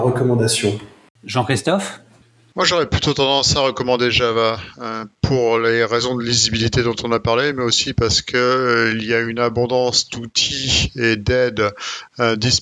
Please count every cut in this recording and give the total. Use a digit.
0